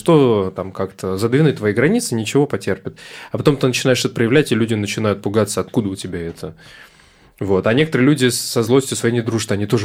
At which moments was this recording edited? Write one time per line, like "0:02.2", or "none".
none

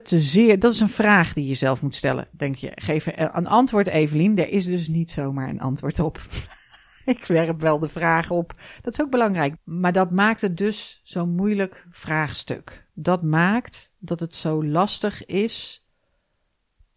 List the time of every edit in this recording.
0:09.5

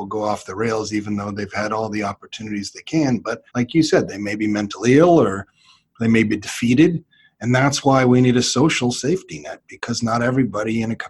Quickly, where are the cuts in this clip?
0:03.5

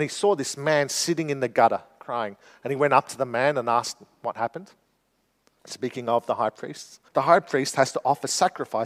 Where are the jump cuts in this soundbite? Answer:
0:05.6
0:07.1

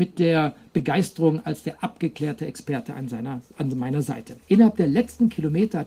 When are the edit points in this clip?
0:04.4

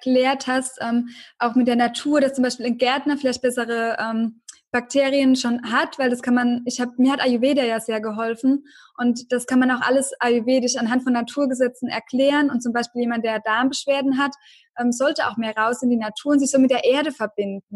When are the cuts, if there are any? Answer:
none

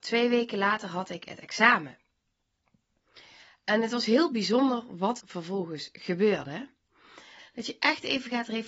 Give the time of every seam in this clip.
0:05.2
0:07.4

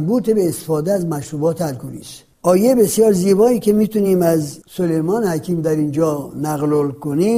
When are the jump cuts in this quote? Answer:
0:02.3
0:04.6

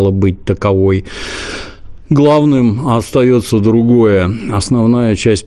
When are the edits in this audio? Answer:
none

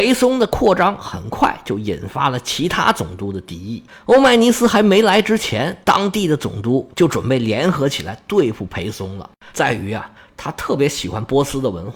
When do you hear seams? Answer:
0:09.5

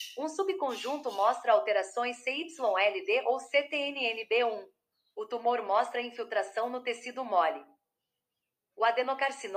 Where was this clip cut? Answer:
0:05.0

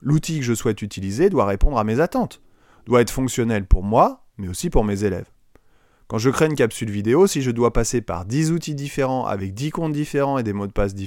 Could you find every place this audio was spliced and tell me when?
none

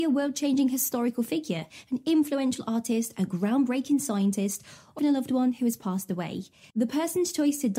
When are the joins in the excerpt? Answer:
0:05.0
0:06.7

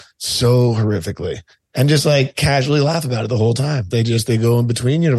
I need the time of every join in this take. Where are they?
0:03.9

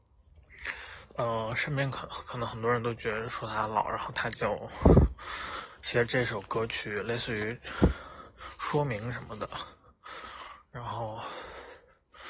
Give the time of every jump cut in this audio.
none

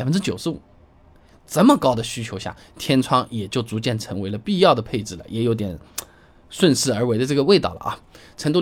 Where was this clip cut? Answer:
none

